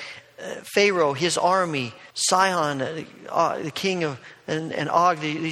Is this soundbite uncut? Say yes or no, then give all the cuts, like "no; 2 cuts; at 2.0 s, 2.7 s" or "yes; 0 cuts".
no; 1 cut; at 2.1 s